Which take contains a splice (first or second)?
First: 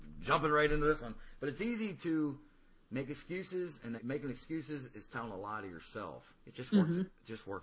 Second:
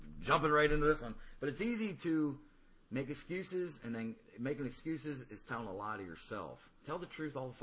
first